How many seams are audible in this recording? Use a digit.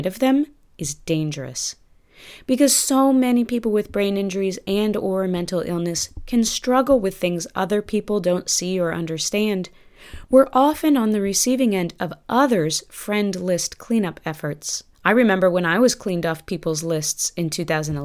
1